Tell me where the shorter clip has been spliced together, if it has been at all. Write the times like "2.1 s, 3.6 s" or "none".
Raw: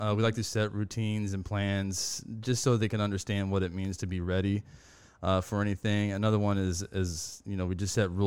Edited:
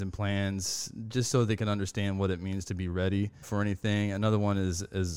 3.4 s